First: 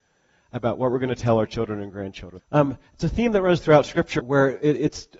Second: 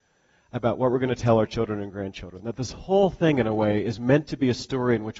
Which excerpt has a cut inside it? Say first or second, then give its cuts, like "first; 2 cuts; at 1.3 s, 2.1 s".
first; 2 cuts; at 2.4 s, 4.2 s